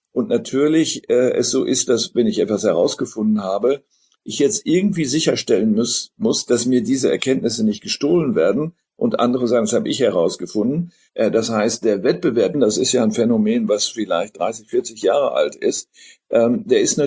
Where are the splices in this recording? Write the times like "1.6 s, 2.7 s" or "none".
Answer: 11.1 s, 12.5 s